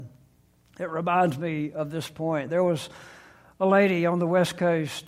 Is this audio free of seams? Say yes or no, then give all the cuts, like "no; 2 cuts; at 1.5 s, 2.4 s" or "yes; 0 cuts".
yes; 0 cuts